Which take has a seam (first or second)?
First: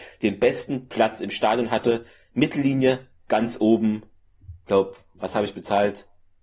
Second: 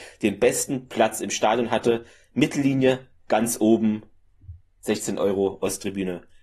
second